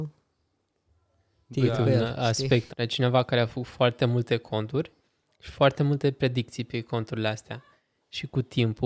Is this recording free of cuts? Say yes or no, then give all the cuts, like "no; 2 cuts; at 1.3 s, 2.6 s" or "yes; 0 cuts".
no; 1 cut; at 2.7 s